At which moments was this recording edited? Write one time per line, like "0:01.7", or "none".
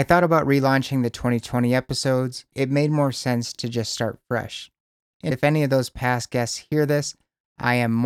0:02.5
0:05.1